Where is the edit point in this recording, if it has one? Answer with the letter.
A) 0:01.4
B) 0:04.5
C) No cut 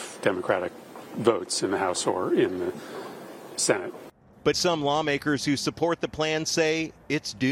B